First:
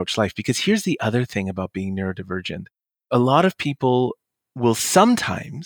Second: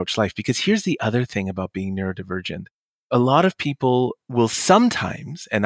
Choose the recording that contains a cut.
second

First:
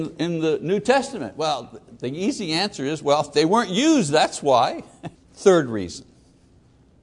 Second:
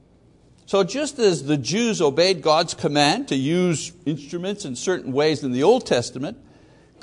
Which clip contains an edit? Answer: first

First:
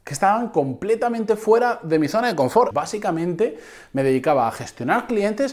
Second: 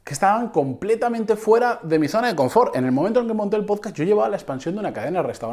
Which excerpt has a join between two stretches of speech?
first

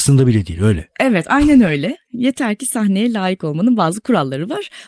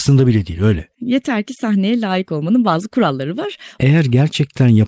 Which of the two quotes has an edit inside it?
second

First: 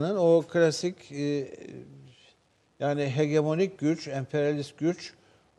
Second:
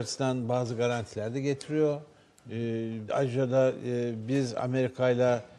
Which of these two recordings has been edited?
second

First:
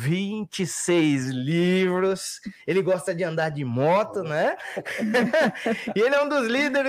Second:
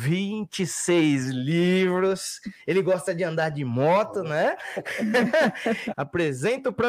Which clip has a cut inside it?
second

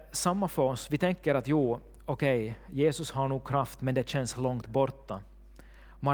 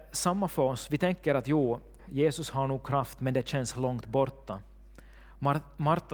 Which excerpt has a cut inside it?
second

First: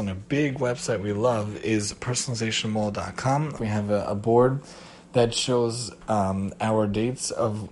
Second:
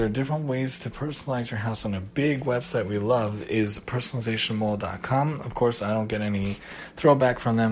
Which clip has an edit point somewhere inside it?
first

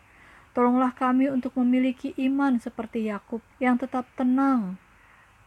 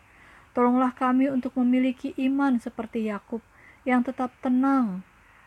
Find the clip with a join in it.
first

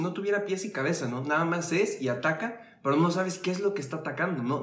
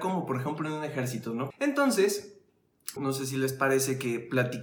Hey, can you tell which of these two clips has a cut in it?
second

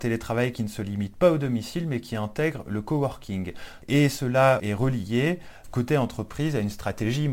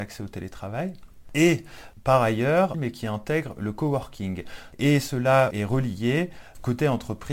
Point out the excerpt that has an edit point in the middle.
second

